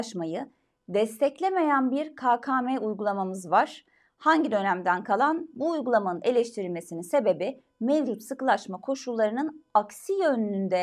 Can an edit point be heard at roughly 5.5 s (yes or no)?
yes